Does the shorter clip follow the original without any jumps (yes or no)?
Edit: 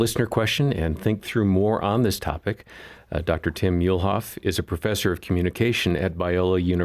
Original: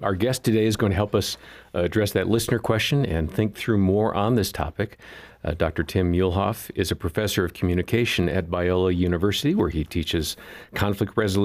yes